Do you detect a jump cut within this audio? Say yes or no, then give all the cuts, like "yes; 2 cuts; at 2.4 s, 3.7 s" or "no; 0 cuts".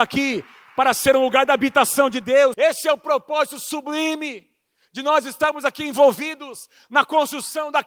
yes; 1 cut; at 2.5 s